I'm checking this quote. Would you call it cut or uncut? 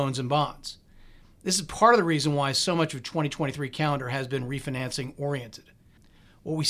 uncut